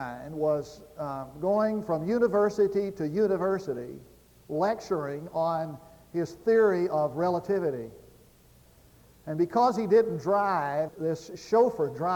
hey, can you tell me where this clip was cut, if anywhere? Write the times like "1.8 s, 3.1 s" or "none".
10.9 s